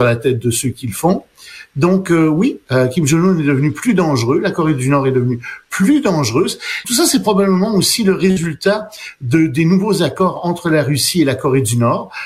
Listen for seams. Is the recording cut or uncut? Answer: cut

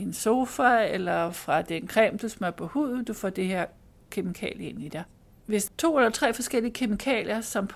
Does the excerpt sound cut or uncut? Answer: cut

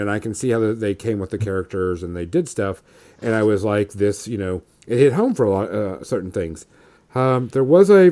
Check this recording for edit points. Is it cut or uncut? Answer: cut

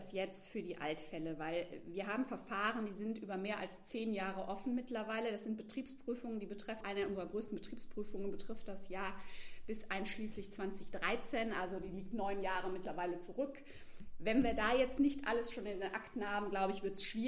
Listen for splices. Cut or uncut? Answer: cut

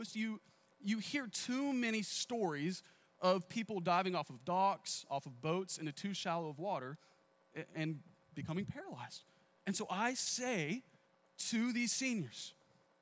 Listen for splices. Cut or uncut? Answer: uncut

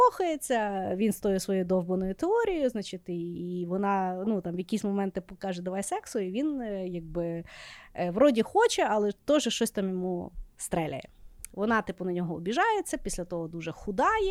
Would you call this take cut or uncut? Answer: uncut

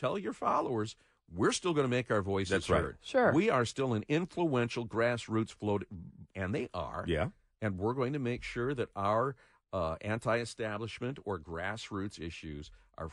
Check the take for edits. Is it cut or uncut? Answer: cut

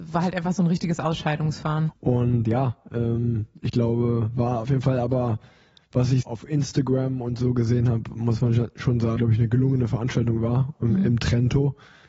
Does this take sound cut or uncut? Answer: cut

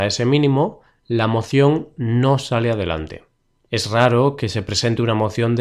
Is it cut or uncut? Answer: cut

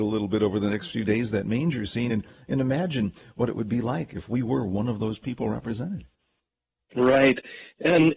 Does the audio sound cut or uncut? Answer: uncut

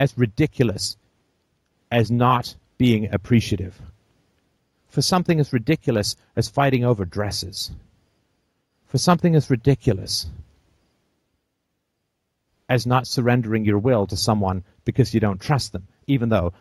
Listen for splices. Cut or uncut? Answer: uncut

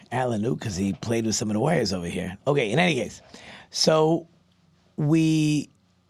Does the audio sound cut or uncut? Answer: cut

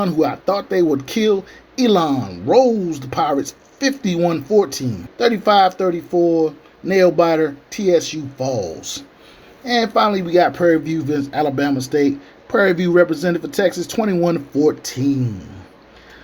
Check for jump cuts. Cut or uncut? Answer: cut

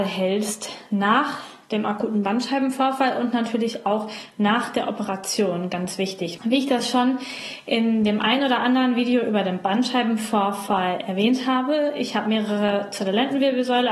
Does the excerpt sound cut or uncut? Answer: cut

